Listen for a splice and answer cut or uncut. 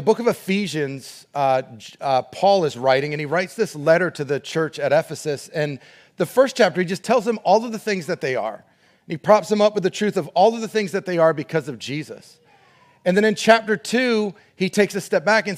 uncut